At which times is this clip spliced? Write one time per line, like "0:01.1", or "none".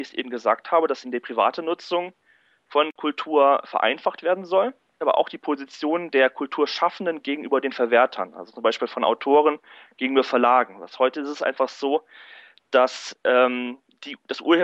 0:01.0